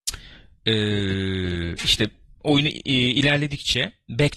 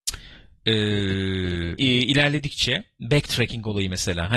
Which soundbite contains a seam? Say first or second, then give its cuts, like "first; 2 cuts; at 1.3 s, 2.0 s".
second; 1 cut; at 1.8 s